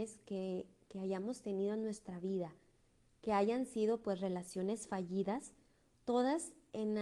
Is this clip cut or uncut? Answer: uncut